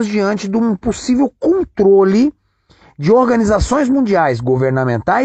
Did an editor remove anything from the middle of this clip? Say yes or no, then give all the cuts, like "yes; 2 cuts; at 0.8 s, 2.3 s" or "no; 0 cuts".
no; 0 cuts